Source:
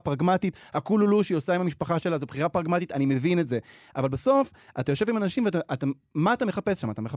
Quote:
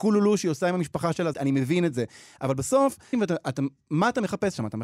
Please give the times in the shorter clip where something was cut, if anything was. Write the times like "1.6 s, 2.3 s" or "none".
1.3 s, 3.1 s

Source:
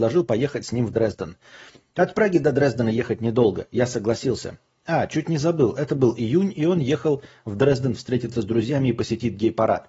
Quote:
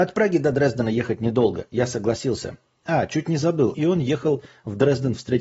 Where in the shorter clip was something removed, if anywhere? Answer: 3.7 s

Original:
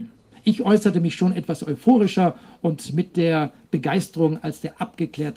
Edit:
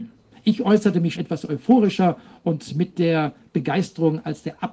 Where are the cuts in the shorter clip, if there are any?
1.2 s

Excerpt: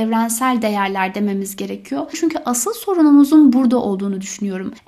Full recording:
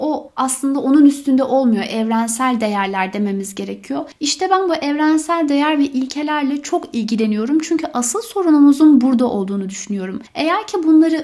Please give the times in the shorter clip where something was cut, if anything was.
2.1 s

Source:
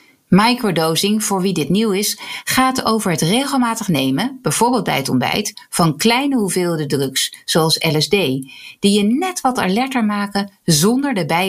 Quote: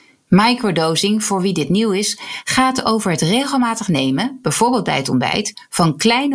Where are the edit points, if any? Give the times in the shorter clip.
none

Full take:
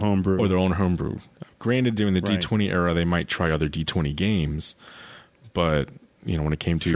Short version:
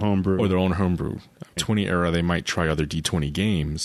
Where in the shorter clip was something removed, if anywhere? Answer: 1.6 s

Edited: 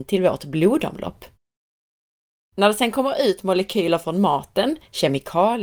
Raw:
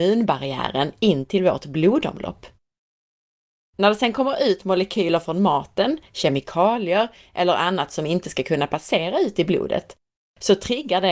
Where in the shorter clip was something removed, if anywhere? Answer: none

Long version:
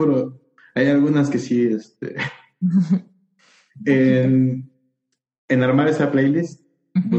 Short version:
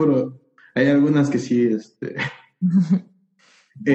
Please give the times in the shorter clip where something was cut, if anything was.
none

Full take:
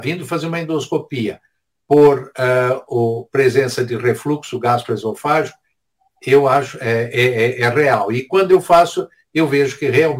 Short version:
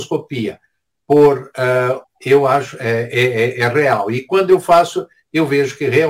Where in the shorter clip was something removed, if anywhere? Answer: 2.0 s

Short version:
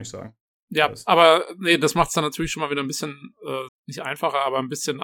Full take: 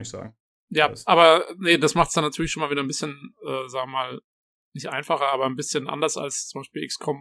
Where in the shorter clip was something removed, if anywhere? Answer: 3.7 s

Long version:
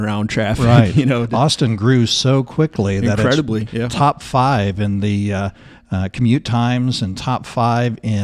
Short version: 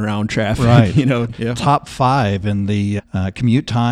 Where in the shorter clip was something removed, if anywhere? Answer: 1.3 s, 3.0 s

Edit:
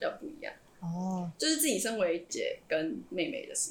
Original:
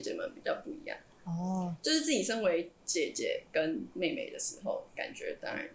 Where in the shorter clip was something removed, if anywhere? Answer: 2.3 s

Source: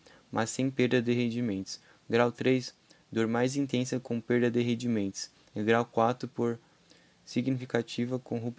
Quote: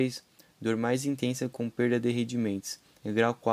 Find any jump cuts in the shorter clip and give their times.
none

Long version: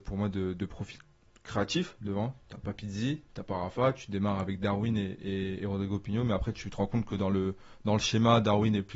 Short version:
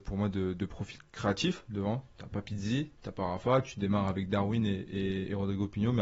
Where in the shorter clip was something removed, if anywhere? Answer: 1.1 s

